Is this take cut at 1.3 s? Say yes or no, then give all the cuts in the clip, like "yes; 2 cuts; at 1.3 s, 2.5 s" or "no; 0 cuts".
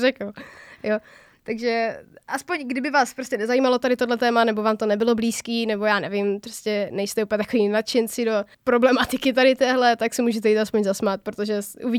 no; 1 cut; at 8.5 s